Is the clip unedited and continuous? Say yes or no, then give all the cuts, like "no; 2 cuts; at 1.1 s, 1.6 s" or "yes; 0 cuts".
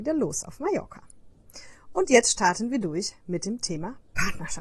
yes; 0 cuts